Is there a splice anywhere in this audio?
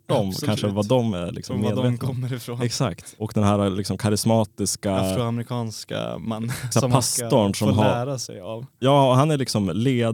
yes; 2 cuts; at 3.2 s, 6.7 s

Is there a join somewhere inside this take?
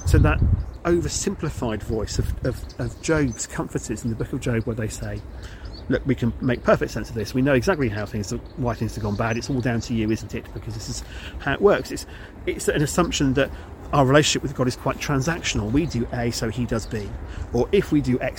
no; 0 cuts

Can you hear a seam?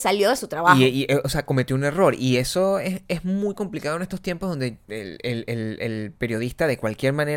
no; 0 cuts

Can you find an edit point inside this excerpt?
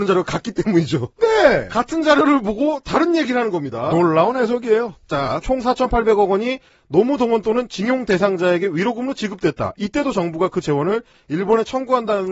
yes; 1 cut; at 5.4 s

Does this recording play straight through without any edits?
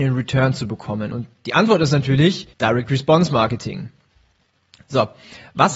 no; 2 cuts; at 1.1 s, 2.5 s

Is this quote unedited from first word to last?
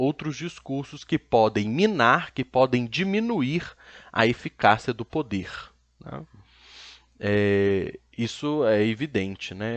yes; 0 cuts

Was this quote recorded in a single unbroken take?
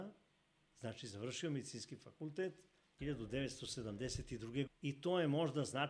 no; 2 cuts; at 3.0 s, 4.7 s

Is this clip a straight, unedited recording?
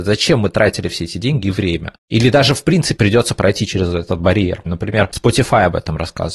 no; 2 cuts; at 3.0 s, 4.7 s

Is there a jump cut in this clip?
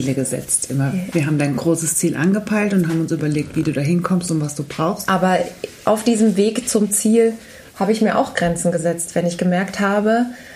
yes; 2 cuts; at 5.1 s, 7.7 s

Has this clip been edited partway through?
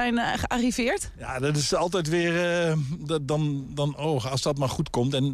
no; 0 cuts

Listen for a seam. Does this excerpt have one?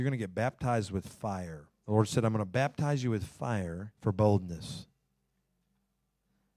yes; 2 cuts; at 1.7 s, 4.0 s

